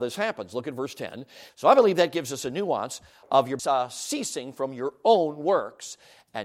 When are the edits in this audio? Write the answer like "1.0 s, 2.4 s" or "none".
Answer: 1.5 s, 3.6 s